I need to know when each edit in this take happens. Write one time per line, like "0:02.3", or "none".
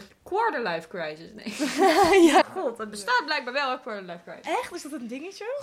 0:02.4